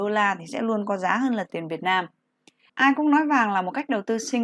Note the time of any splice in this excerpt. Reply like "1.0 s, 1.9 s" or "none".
2.7 s

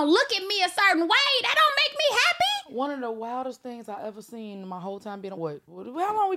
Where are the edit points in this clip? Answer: 5.4 s

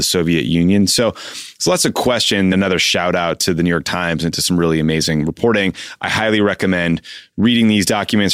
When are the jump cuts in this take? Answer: 2.5 s

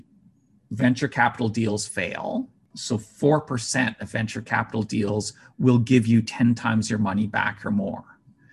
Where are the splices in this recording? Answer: 2.7 s

